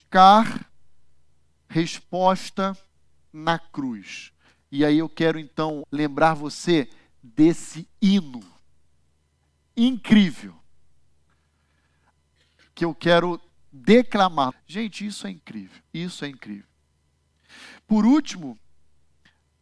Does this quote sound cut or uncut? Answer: cut